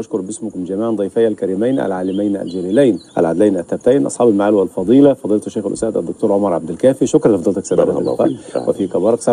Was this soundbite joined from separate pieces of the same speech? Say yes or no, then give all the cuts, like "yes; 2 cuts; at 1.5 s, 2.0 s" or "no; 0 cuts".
yes; 1 cut; at 3.1 s